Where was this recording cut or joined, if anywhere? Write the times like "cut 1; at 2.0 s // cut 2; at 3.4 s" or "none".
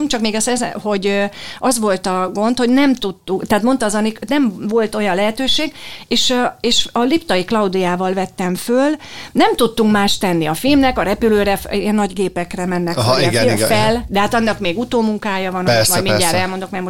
cut 1; at 14.1 s